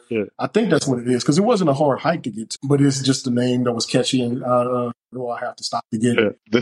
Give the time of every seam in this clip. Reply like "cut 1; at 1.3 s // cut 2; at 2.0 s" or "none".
cut 1; at 2.6 s // cut 2; at 5.1 s